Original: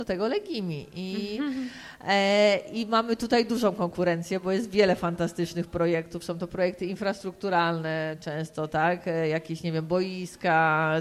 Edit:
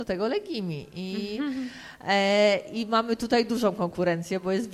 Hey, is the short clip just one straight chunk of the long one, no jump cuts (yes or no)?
yes